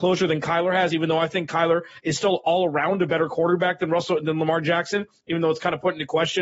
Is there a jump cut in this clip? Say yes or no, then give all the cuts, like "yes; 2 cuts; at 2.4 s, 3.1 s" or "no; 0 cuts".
no; 0 cuts